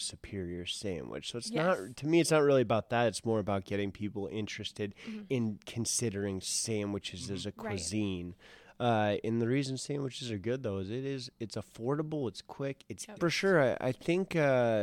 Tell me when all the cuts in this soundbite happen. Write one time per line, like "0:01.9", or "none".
0:13.1